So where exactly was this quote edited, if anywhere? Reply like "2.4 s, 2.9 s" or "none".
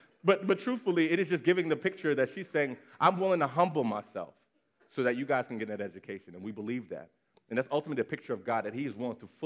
none